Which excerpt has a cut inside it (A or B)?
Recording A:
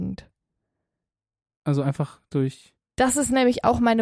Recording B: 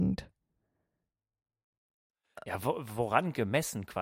A